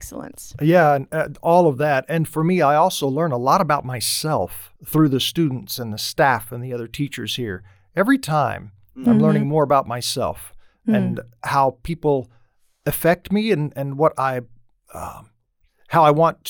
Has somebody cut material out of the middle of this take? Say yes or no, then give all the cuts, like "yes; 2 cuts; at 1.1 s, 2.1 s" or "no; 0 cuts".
yes; 1 cut; at 4.8 s